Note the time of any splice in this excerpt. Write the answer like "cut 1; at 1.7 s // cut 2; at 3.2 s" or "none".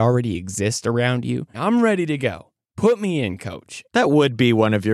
cut 1; at 1.5 s // cut 2; at 3.9 s